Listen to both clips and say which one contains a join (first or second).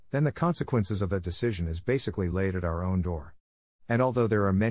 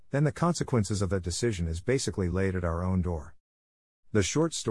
first